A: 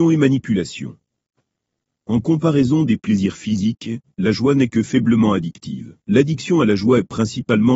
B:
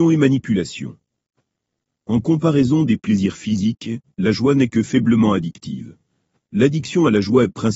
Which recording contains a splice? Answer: A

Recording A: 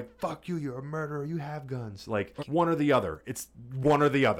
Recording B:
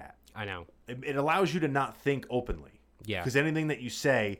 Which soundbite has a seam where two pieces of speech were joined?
A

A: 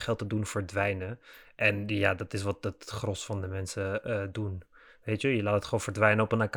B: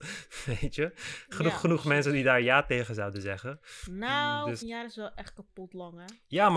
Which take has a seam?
B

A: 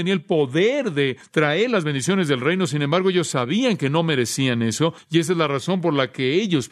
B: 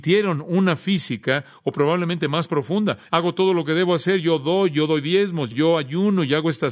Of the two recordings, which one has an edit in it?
B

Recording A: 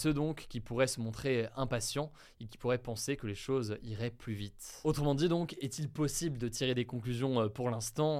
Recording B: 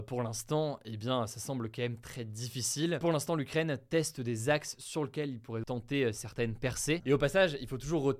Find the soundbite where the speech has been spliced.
B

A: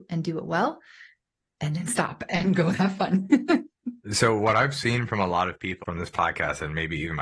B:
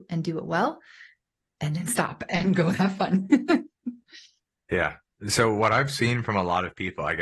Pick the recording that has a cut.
A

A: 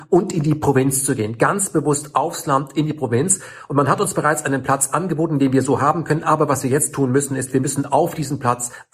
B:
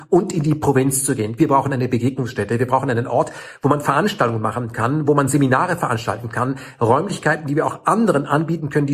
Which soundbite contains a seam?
B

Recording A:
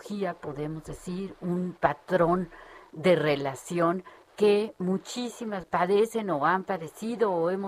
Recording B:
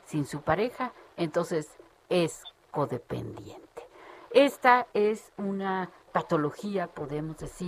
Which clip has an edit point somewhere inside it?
A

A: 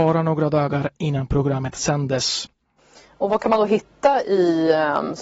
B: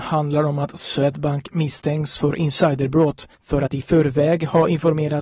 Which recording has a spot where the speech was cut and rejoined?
B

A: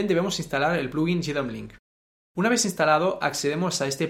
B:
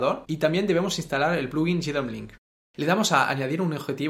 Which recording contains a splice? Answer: B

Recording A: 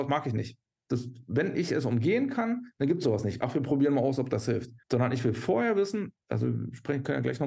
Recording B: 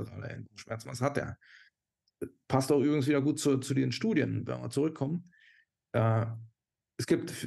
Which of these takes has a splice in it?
A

